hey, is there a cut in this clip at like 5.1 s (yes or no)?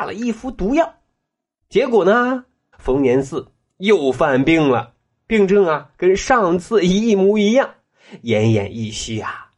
no